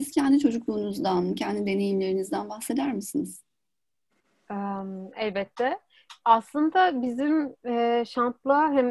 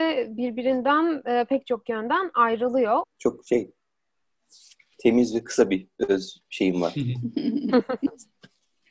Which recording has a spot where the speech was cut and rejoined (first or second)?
second